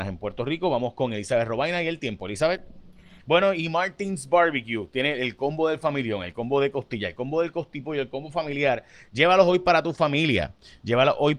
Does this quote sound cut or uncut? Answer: cut